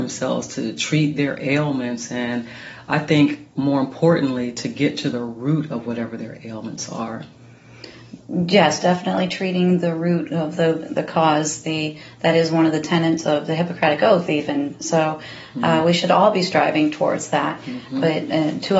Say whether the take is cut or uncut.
uncut